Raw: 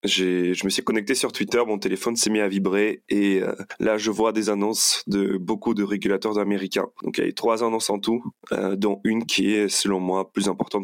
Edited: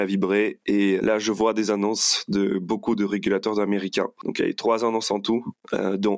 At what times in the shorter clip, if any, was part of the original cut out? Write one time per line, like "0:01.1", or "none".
0:01.0